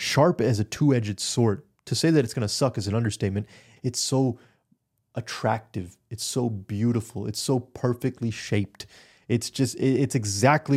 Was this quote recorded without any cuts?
no; 1 cut; at 3.8 s

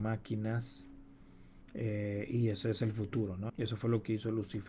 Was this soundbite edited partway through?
yes; 1 cut; at 3.5 s

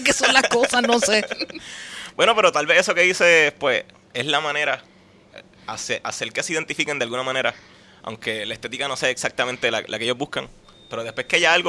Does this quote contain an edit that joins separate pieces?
no; 0 cuts

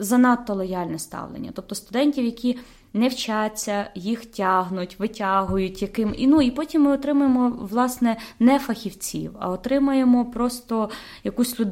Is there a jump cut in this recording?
no; 0 cuts

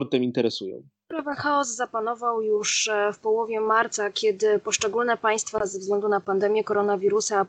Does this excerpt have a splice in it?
no; 0 cuts

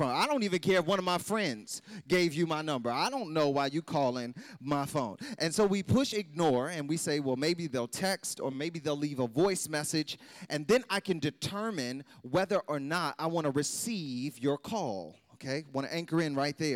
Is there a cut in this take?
no; 0 cuts

